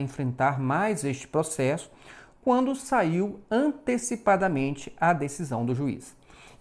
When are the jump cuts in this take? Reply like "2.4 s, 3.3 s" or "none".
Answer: none